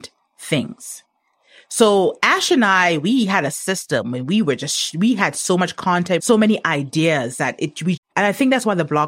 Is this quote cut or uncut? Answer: cut